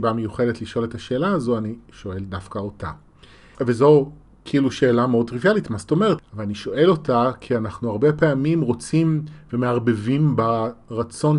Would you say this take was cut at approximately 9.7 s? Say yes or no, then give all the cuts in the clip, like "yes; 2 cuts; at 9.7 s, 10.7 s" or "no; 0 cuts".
no; 2 cuts; at 3.5 s, 6.2 s